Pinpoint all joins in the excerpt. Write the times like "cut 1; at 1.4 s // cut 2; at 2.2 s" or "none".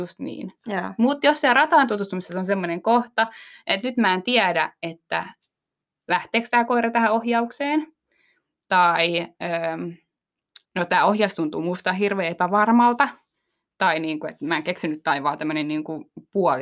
cut 1; at 10.7 s